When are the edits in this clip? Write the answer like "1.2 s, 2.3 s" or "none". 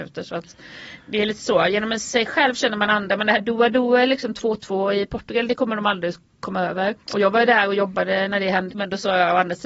7.0 s, 8.7 s